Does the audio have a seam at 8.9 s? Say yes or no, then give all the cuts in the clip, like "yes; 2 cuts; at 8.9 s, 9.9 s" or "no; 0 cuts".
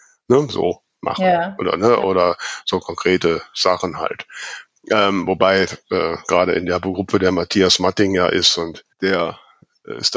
yes; 1 cut; at 8.9 s